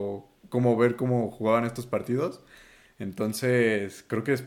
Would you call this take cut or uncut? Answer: uncut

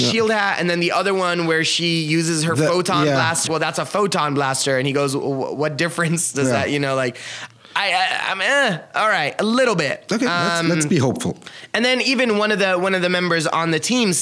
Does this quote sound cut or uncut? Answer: cut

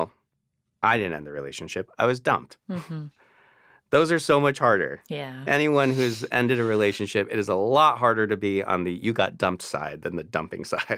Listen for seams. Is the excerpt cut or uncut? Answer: uncut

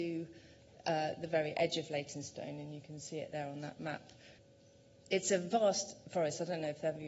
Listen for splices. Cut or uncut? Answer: uncut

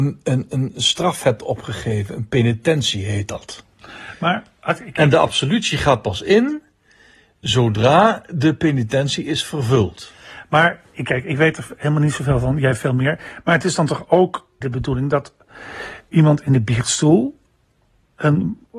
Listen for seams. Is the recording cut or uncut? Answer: cut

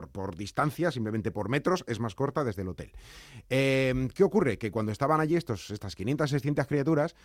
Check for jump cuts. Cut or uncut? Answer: uncut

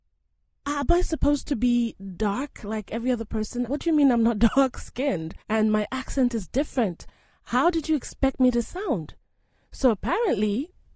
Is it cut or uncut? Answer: cut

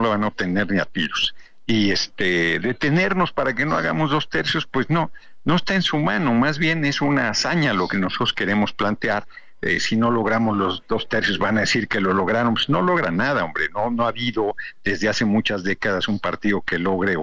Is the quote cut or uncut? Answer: uncut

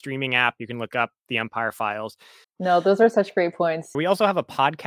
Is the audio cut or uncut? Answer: cut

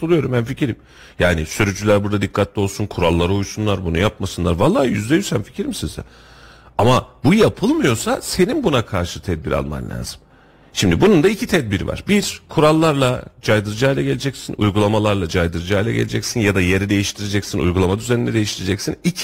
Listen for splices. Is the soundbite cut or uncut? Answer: uncut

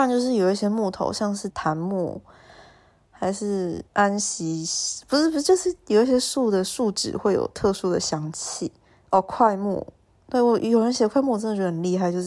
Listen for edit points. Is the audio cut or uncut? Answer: cut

